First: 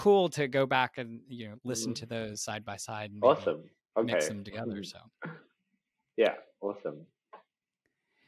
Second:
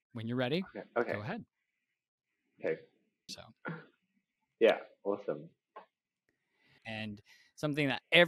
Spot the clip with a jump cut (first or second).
second